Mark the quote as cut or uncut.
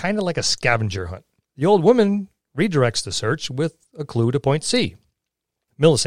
cut